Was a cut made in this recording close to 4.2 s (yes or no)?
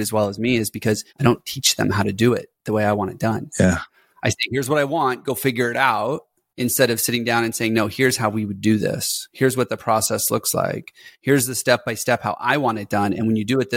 no